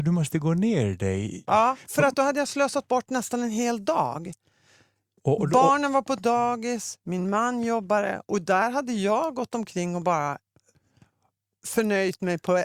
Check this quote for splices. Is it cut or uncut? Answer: cut